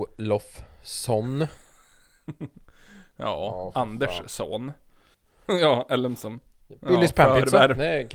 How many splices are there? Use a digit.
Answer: 2